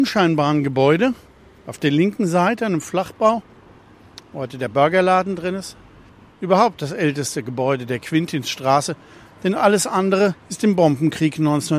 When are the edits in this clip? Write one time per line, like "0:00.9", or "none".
0:06.3
0:10.4